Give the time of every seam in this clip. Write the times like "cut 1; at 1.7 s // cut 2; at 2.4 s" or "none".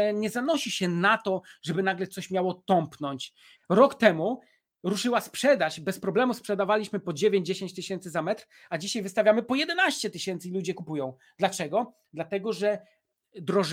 cut 1; at 3.5 s